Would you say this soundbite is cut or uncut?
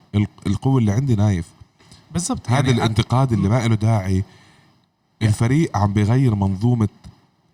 uncut